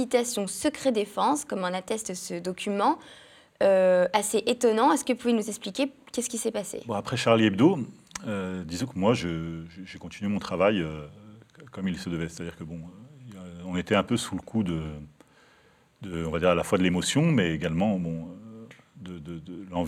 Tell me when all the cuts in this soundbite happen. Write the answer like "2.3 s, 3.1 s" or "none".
none